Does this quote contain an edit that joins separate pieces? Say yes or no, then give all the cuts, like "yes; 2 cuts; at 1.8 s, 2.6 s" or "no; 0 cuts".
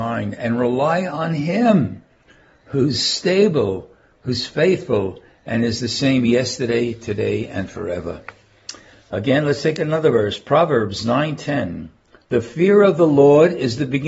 no; 0 cuts